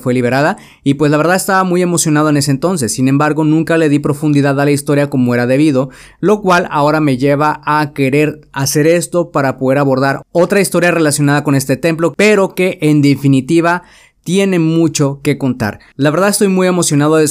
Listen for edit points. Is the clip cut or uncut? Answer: uncut